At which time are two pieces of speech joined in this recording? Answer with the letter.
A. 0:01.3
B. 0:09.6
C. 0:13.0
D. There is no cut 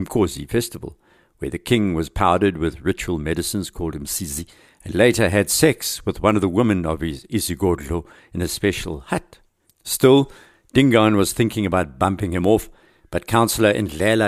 B